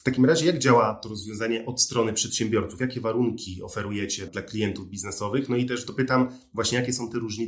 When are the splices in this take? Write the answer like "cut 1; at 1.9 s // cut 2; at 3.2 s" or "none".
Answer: cut 1; at 4.3 s